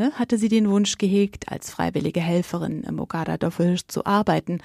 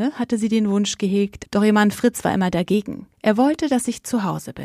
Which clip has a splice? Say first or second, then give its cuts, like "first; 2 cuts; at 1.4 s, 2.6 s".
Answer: second; 2 cuts; at 1.4 s, 3.1 s